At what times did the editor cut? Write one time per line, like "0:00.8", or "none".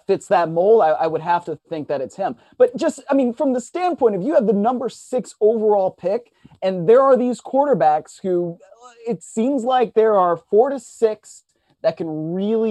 none